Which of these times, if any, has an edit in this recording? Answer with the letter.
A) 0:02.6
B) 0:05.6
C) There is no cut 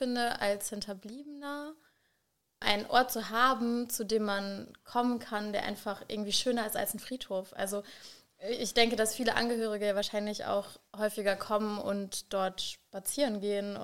A